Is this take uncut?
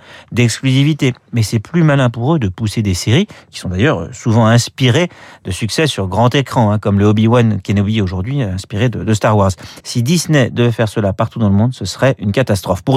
no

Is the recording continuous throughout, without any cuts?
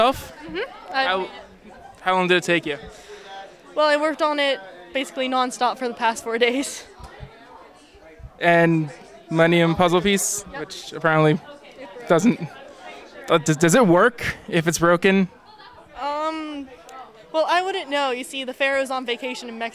yes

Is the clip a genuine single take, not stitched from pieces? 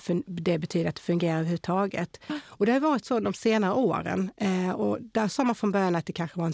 no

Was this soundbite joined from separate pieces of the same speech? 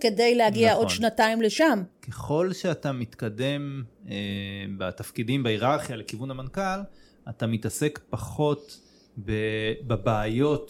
yes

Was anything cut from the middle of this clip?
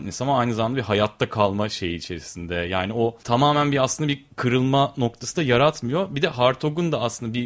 no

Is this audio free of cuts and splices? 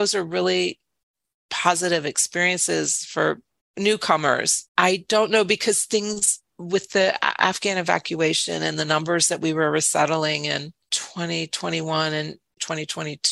no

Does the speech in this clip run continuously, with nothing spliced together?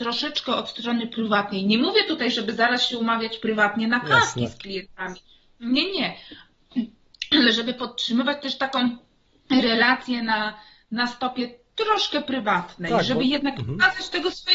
yes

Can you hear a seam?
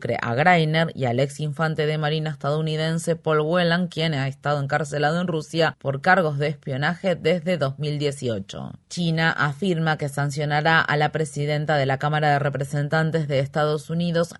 no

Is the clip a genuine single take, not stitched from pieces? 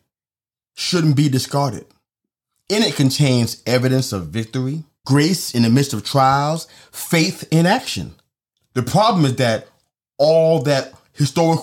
no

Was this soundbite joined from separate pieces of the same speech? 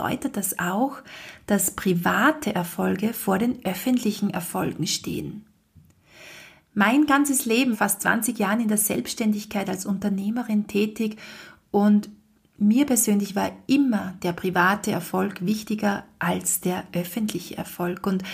yes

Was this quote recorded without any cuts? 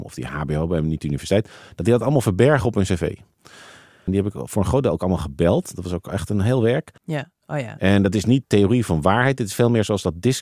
no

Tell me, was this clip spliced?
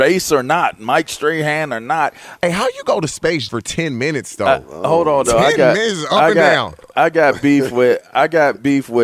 yes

